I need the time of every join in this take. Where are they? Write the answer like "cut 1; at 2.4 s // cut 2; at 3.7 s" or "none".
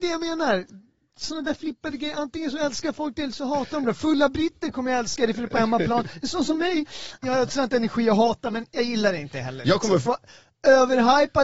cut 1; at 7.2 s // cut 2; at 10.1 s